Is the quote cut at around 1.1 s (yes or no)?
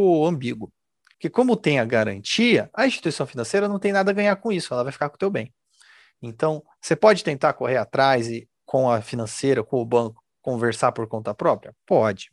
yes